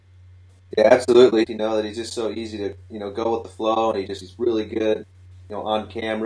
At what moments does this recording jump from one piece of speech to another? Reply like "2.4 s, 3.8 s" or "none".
1.5 s